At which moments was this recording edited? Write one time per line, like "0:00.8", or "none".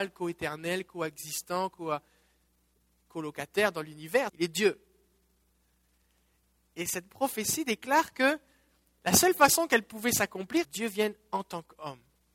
0:04.3
0:10.6